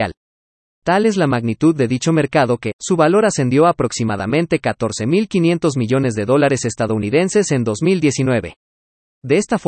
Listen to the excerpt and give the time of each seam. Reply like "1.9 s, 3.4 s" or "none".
2.7 s